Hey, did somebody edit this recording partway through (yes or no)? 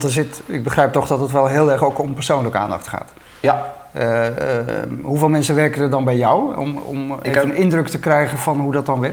no